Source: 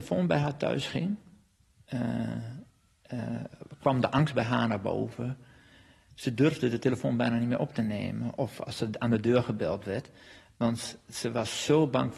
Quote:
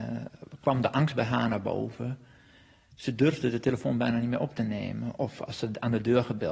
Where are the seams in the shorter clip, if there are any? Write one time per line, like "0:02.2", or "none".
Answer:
none